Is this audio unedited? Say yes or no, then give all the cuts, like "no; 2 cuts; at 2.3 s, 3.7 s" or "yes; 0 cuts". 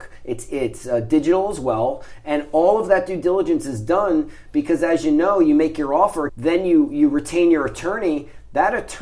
no; 1 cut; at 6.3 s